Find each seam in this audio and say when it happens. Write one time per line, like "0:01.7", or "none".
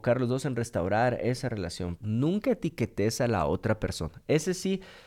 0:02.0